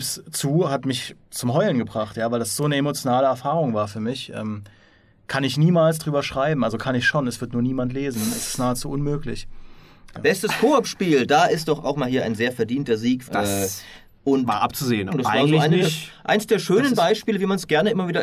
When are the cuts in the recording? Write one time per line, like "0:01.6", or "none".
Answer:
0:10.1
0:13.3
0:15.1